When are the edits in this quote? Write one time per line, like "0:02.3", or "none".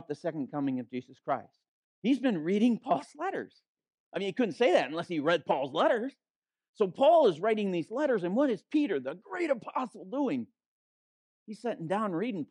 0:01.8